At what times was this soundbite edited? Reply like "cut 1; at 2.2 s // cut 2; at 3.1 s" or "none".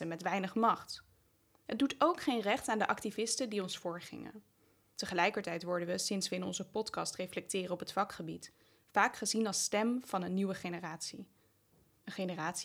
cut 1; at 4.9 s